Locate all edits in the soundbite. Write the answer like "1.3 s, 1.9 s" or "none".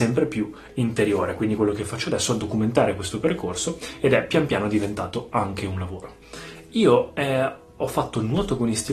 none